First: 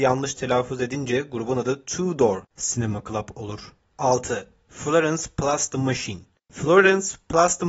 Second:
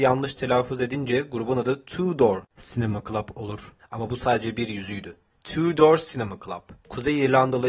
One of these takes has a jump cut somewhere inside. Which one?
second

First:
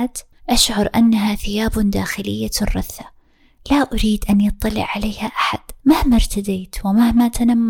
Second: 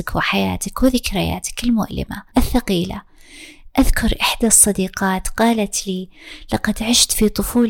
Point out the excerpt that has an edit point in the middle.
first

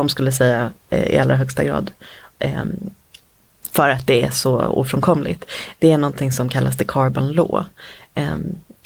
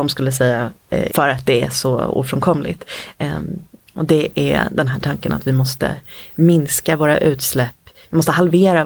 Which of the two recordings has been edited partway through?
second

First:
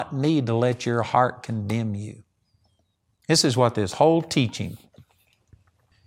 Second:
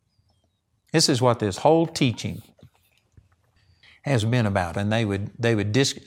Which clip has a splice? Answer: second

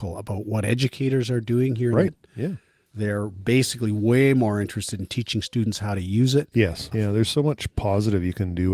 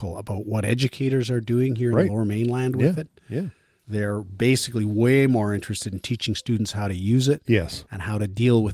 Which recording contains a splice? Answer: first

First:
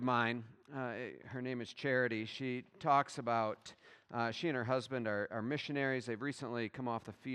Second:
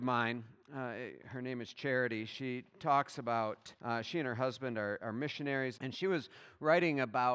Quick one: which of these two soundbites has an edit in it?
second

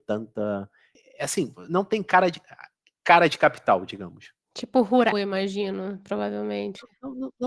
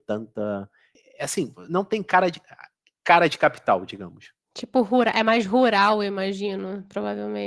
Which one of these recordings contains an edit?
first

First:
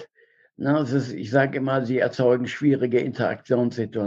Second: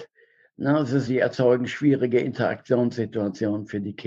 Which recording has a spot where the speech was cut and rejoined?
second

